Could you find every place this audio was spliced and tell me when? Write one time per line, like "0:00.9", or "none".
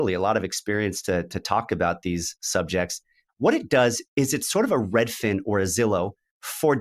0:03.3